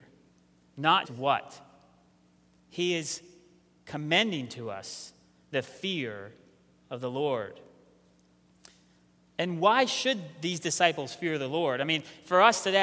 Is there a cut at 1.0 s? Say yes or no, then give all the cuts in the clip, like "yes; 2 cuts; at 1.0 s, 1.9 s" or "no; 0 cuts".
yes; 1 cut; at 1.0 s